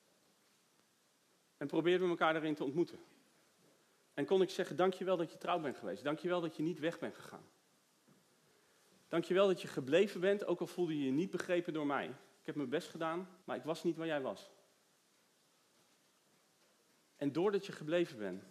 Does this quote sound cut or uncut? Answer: cut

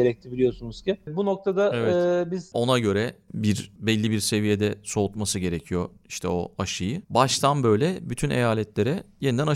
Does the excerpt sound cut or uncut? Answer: cut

